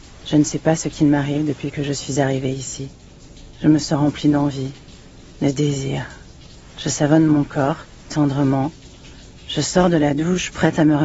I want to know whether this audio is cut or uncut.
cut